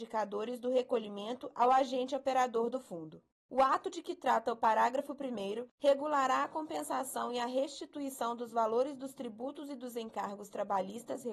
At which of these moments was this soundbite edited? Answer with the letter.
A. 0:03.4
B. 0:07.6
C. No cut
A